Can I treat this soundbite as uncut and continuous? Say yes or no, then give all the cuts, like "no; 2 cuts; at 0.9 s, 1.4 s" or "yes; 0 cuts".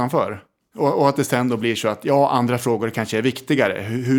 yes; 0 cuts